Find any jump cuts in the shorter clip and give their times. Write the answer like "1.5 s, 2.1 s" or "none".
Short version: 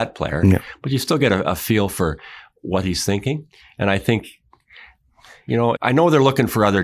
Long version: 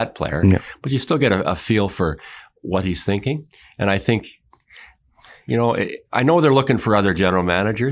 5.8 s